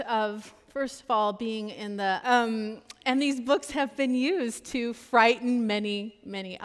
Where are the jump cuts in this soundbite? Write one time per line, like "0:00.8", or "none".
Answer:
0:02.2

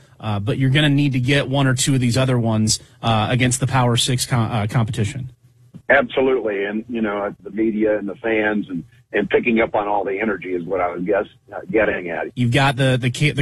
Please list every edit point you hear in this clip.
0:07.4
0:12.3

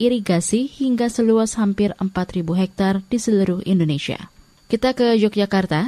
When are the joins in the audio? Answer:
none

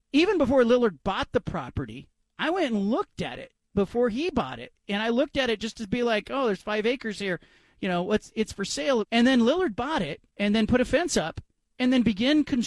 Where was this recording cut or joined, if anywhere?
0:09.0
0:10.3

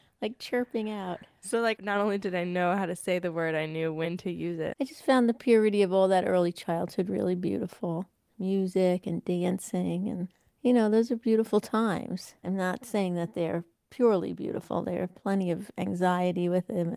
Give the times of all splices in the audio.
0:04.7
0:12.4

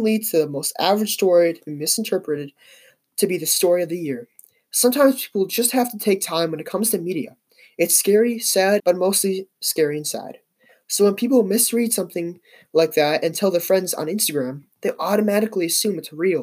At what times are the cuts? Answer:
0:08.8

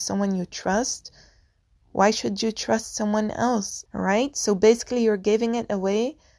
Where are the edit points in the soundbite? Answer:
0:01.8
0:03.9

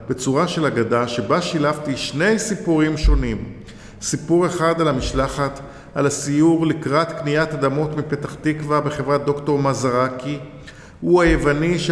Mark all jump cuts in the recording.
none

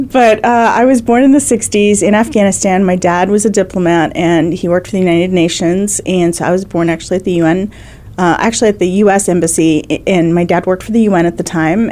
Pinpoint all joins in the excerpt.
none

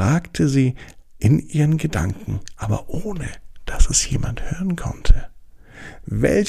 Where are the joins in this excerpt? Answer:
none

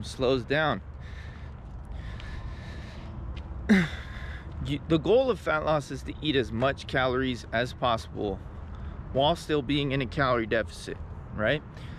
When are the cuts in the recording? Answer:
0:01.6

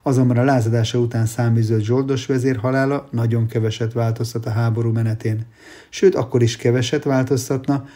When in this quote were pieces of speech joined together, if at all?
none

